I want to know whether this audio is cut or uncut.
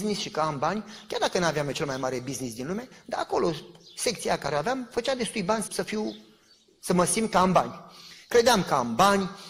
cut